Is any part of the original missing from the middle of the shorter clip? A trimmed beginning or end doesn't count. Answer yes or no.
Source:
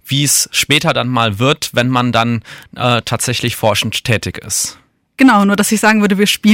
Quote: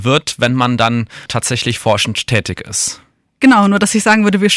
yes